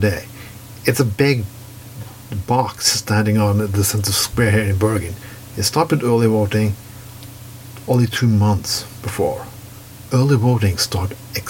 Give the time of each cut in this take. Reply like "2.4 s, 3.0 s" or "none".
5.5 s, 10.1 s

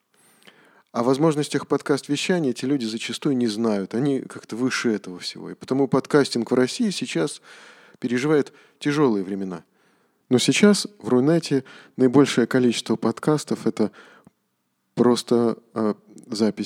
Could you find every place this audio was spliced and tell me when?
10.2 s

